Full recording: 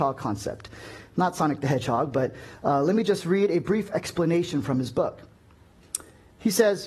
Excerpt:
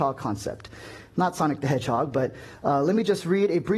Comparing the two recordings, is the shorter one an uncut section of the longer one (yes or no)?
yes